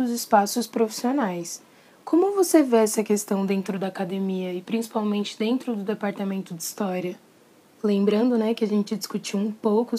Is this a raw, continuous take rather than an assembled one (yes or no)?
yes